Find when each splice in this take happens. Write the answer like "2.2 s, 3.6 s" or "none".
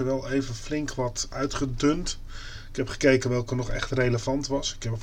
none